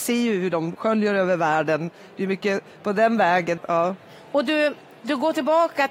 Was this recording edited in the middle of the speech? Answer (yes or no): yes